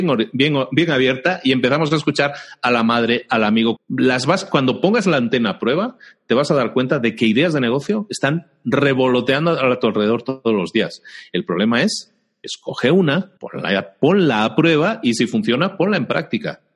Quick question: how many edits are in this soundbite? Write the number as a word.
two